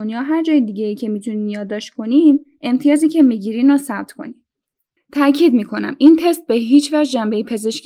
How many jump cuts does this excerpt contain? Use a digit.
1